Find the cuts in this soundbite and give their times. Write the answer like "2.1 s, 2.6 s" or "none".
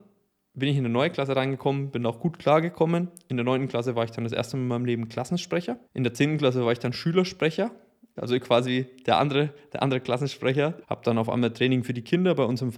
5.9 s, 8.2 s, 10.8 s